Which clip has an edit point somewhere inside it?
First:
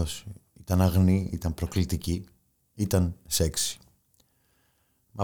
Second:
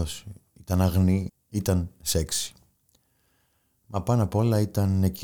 second; 1 cut; at 1.3 s

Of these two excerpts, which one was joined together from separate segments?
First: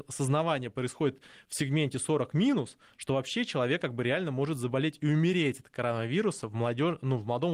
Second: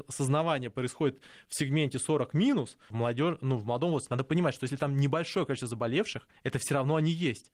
second; 1 cut; at 2.9 s

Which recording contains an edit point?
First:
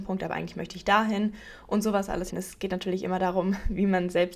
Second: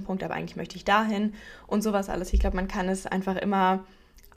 first; 1 cut; at 2.3 s

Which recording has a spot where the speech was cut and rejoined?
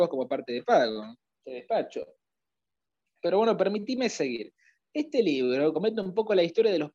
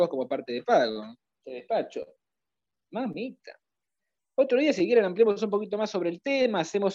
second; 1 cut; at 2.7 s

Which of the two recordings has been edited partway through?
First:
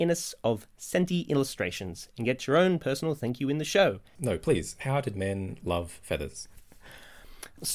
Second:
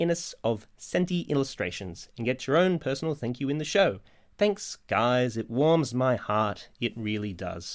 first; 1 cut; at 4.2 s

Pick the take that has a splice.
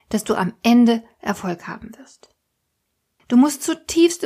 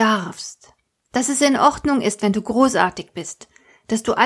first; 1 cut; at 3.2 s

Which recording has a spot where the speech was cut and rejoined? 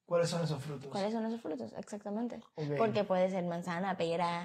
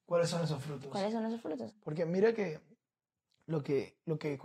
second; 1 cut; at 1.7 s

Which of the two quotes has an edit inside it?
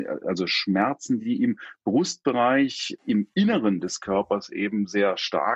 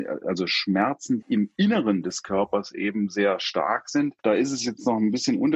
second; 1 cut; at 1.2 s

